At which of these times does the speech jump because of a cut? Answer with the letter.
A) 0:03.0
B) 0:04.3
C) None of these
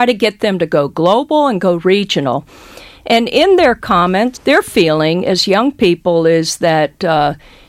B